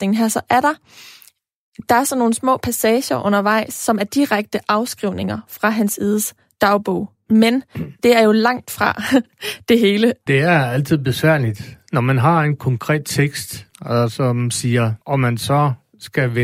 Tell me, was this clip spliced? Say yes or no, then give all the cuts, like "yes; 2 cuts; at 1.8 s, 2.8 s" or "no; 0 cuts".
yes; 3 cuts; at 10.3 s, 13.7 s, 15.0 s